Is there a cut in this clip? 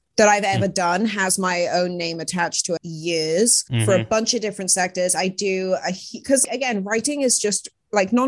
yes; 2 cuts; at 2.8 s, 6.4 s

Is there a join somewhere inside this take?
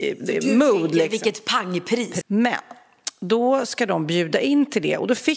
yes; 1 cut; at 2.2 s

